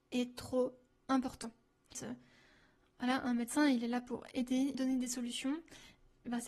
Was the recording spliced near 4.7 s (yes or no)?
yes